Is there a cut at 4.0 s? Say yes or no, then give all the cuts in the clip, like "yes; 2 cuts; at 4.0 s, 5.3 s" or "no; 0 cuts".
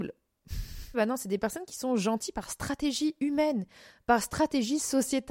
no; 1 cut; at 0.9 s